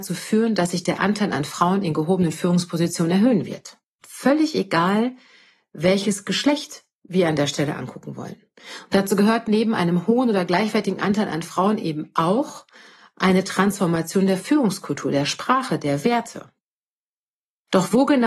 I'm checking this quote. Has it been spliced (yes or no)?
yes